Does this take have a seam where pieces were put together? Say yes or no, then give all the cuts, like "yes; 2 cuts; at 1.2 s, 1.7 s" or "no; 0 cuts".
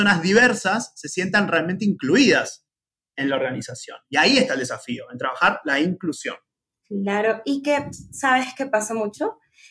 no; 0 cuts